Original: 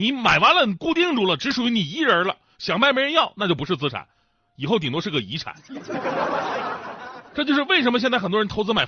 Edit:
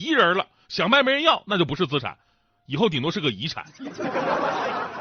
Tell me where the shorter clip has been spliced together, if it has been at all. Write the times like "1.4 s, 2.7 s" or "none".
none